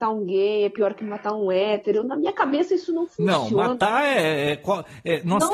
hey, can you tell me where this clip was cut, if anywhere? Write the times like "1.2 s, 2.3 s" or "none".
none